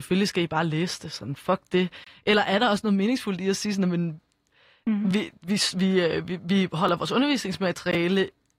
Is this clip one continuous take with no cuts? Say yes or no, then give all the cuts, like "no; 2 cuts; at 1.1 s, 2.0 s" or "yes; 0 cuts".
yes; 0 cuts